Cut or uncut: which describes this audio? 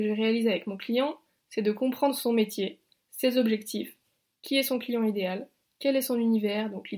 uncut